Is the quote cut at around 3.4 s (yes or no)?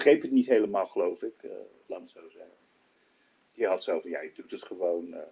no